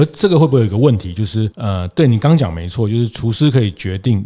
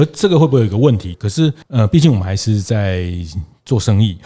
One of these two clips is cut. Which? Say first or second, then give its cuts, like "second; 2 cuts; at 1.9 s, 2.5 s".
second; 1 cut; at 1.1 s